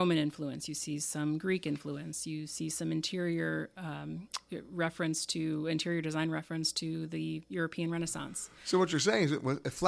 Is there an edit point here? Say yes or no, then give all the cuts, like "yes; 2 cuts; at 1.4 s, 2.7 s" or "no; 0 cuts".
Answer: no; 0 cuts